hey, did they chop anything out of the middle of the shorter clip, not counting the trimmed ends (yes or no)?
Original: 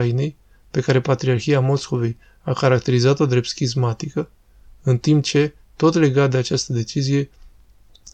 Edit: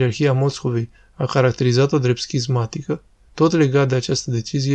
yes